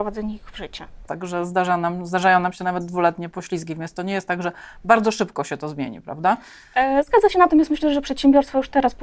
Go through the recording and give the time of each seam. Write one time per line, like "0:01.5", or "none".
0:01.1